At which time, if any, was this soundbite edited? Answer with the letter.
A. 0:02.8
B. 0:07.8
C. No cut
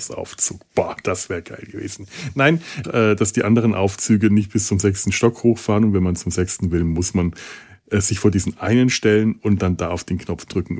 A